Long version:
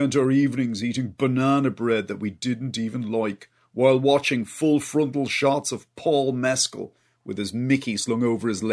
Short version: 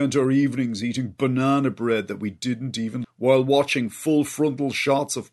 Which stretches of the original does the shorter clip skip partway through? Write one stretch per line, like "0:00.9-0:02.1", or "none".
0:03.0-0:03.6